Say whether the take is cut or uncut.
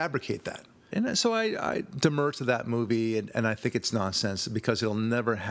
cut